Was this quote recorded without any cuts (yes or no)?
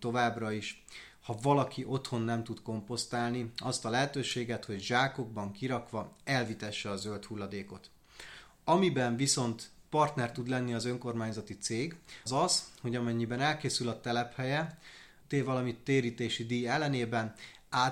no